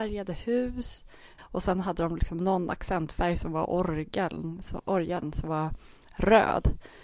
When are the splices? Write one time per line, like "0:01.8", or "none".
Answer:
0:01.4